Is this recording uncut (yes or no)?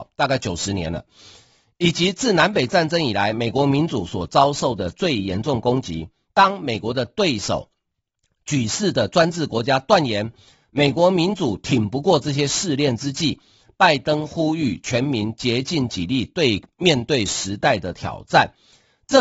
yes